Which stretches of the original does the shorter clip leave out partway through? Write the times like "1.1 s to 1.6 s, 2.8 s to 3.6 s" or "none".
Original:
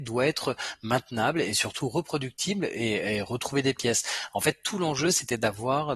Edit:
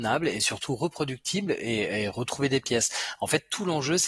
none

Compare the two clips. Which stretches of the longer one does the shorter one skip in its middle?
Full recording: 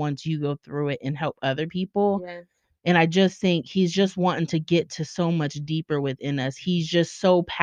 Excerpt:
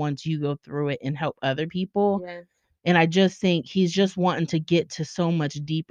none

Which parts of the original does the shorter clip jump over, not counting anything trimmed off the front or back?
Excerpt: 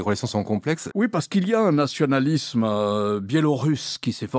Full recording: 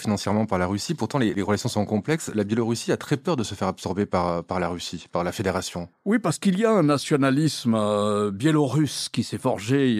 2.3 s to 6.0 s

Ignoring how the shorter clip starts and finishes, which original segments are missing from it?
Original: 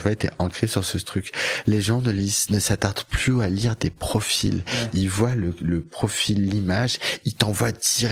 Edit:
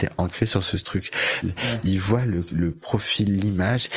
1.6 s to 4.5 s

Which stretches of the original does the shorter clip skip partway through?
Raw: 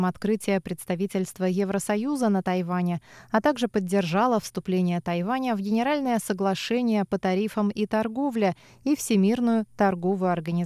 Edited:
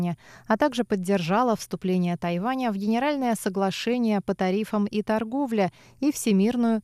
none

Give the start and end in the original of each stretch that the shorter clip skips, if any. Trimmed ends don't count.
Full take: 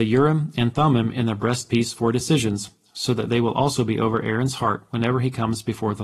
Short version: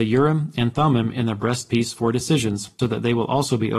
2.8 s to 3.1 s

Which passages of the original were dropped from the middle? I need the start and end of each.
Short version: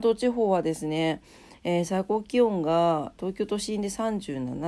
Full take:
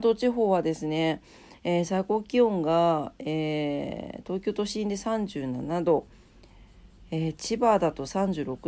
3.2 s to 4.2 s

